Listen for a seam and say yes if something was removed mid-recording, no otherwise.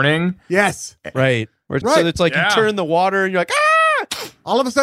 yes